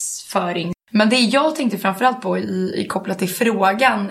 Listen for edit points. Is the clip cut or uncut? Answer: uncut